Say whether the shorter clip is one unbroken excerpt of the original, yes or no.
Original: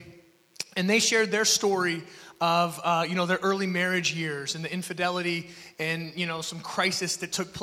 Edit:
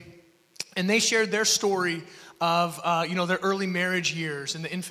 yes